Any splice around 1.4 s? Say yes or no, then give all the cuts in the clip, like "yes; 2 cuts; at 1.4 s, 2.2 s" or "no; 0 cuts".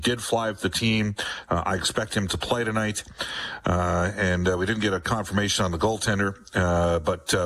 no; 0 cuts